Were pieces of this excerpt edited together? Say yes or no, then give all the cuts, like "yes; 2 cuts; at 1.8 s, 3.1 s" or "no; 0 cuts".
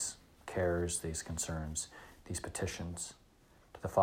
no; 0 cuts